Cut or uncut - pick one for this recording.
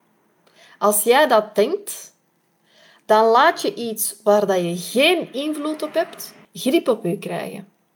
cut